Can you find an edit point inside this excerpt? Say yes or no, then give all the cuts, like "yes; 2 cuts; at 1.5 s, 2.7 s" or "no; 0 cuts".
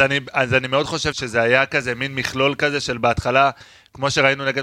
yes; 1 cut; at 1.1 s